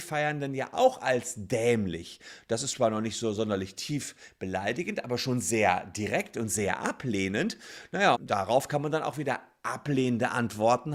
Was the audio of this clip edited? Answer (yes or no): yes